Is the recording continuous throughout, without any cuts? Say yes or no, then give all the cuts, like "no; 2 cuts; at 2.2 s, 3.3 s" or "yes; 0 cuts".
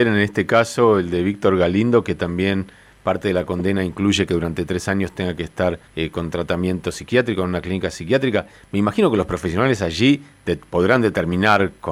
no; 1 cut; at 5.9 s